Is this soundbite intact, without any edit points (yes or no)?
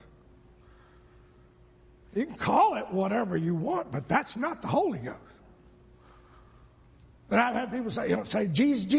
yes